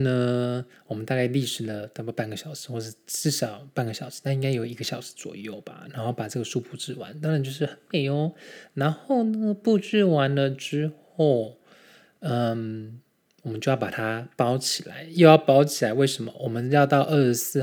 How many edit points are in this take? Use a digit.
0